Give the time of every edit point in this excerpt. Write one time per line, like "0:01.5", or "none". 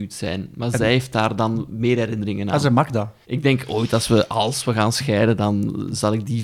0:03.2